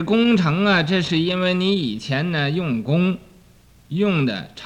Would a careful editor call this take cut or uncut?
uncut